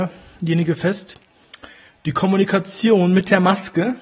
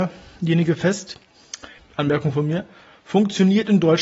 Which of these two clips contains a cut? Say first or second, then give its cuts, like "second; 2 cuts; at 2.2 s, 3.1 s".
second; 1 cut; at 1.8 s